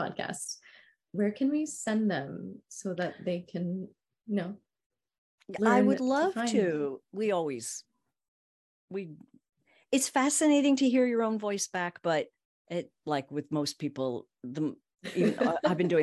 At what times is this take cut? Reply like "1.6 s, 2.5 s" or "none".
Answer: 7.0 s